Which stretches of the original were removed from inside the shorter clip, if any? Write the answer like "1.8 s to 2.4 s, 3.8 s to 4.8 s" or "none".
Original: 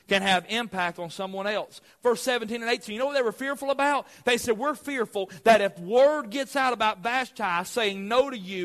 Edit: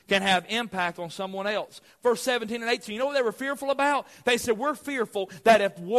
none